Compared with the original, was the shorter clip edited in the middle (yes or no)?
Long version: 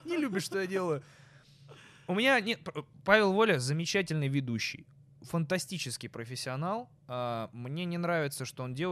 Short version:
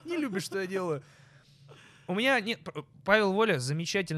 no